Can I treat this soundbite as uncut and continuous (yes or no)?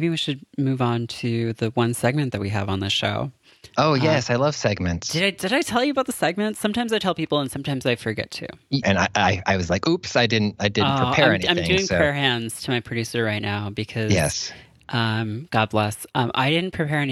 no